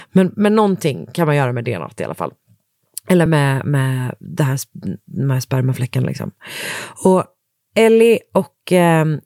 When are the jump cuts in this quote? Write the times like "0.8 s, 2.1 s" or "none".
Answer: none